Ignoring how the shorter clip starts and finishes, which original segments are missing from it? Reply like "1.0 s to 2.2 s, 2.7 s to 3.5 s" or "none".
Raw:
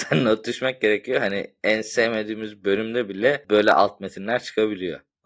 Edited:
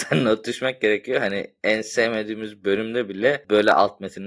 none

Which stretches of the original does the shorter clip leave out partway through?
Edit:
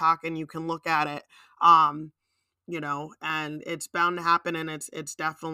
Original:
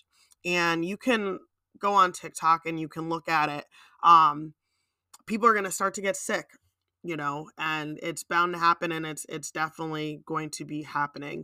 4.9 s to 6.9 s

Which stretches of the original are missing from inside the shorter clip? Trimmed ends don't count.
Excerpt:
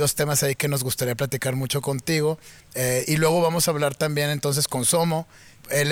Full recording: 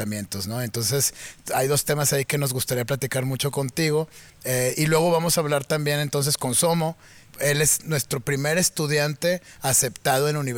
none

